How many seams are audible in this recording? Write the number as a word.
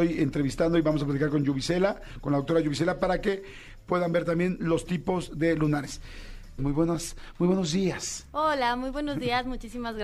one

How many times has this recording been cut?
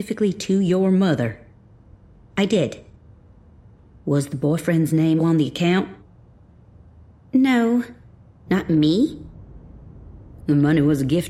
three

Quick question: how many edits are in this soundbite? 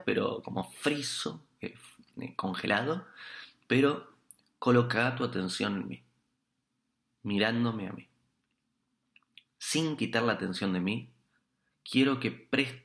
zero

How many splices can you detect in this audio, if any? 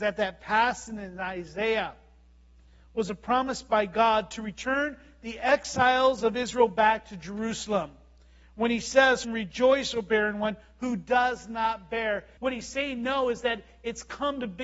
two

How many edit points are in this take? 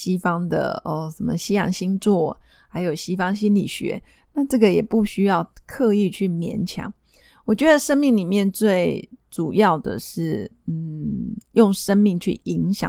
zero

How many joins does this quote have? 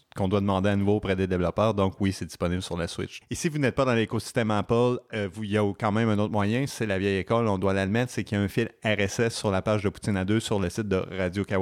one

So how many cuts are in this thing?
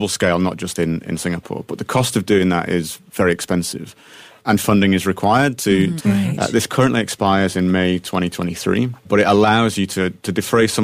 two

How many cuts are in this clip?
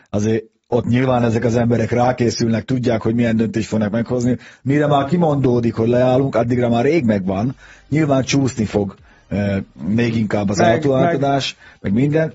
zero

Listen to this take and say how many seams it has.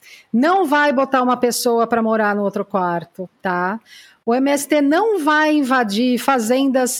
zero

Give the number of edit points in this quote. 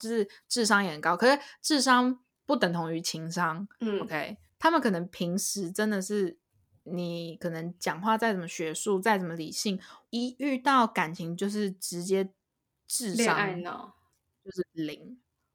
one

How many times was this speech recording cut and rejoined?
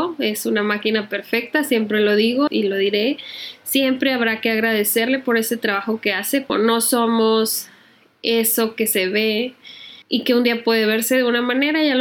three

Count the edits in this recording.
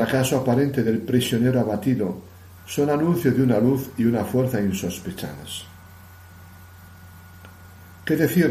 one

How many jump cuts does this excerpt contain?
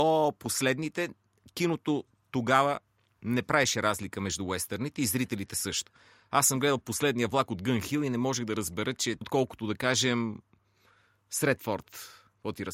one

